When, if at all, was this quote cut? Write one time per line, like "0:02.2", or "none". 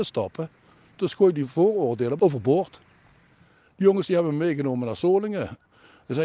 0:02.2